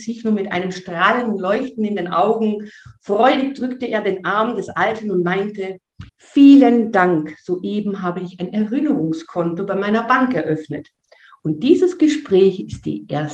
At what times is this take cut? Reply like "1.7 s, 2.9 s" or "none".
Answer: 6.1 s